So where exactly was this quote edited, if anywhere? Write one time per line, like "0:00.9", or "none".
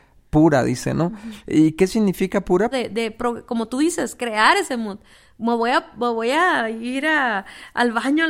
0:02.7